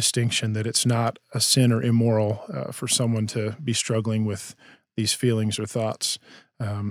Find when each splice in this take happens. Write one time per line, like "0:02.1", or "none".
none